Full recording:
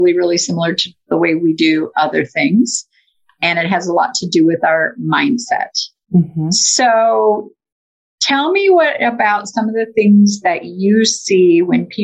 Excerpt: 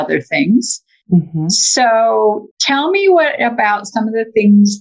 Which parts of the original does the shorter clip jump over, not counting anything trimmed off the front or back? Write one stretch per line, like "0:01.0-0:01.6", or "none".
0:03.1-0:06.0
0:07.5-0:08.1